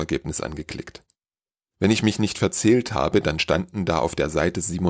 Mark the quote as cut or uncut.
uncut